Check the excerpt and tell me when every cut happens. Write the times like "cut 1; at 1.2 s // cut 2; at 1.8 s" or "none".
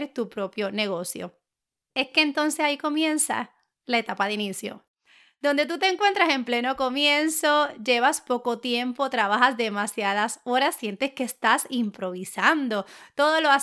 none